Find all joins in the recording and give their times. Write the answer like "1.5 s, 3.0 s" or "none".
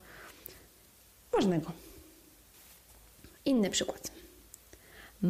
none